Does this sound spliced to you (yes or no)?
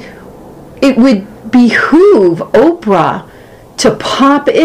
no